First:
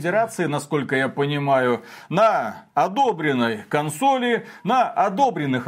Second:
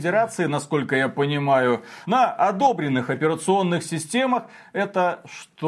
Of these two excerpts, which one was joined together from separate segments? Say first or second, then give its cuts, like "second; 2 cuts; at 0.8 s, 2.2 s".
second; 1 cut; at 2.0 s